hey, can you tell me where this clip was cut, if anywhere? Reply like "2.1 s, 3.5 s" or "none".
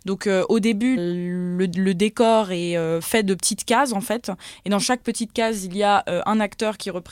1.0 s